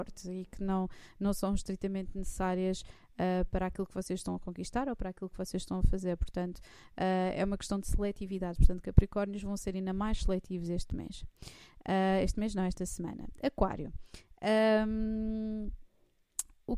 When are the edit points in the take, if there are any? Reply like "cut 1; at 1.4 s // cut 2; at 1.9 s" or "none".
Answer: none